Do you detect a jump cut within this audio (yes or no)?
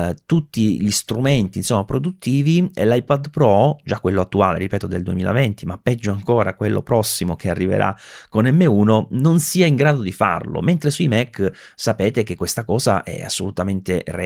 no